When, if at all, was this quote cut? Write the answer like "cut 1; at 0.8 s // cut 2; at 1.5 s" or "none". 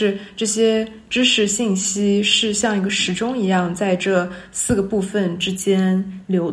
none

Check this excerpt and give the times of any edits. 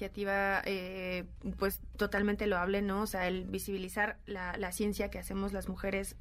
none

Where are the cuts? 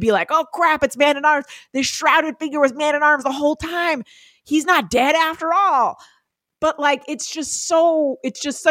none

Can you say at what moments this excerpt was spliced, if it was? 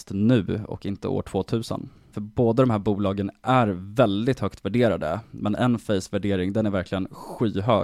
cut 1; at 2.1 s

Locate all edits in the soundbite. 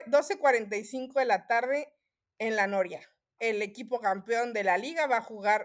cut 1; at 3.4 s

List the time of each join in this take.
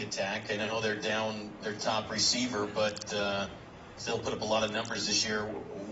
none

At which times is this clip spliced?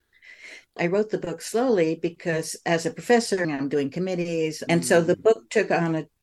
cut 1; at 3.4 s // cut 2; at 4.7 s

